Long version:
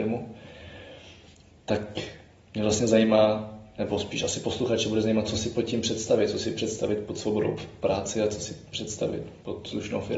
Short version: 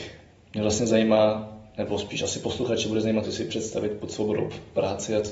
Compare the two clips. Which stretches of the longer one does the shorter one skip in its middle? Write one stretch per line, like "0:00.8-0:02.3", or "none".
0:05.3-0:06.3